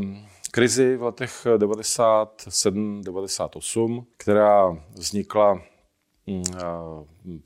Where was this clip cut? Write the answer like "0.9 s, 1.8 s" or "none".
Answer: 4.1 s